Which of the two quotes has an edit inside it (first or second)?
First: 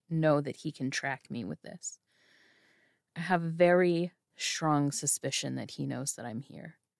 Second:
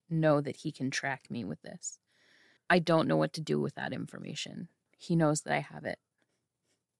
second